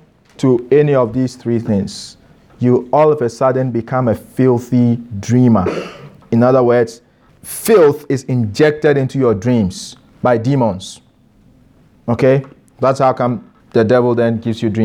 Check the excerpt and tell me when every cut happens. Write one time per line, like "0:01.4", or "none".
0:07.3
0:13.6